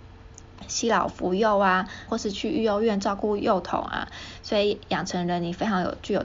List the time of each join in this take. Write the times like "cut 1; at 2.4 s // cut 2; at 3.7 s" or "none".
cut 1; at 2.1 s